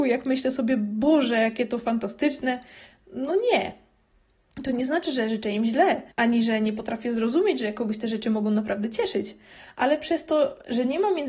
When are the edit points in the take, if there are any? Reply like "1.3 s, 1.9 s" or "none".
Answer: 6.1 s